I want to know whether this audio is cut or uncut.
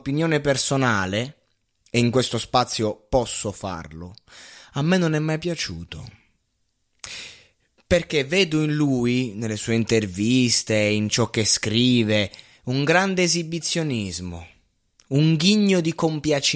uncut